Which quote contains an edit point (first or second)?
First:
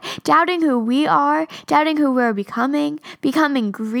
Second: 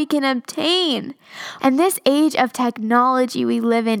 second